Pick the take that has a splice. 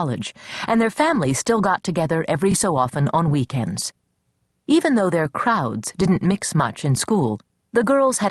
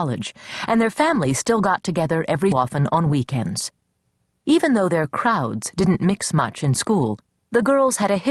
second; 1 cut; at 2.5 s

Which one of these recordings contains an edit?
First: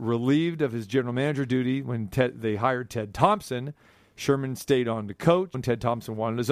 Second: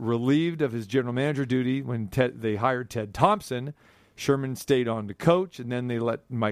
first; 1 cut; at 5.5 s

